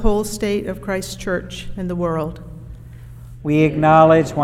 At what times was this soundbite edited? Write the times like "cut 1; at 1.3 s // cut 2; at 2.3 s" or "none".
cut 1; at 3.4 s